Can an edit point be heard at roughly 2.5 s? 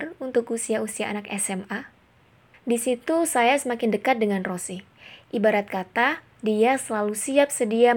yes; 1 cut; at 2.5 s

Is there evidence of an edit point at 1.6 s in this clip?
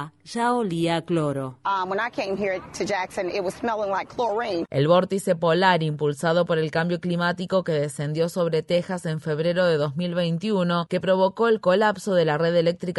no; 0 cuts

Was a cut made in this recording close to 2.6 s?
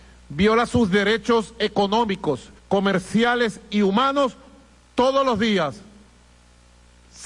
yes; 1 cut; at 2.6 s

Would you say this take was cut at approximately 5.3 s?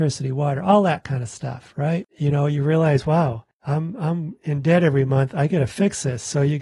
no; 1 cut; at 2.1 s

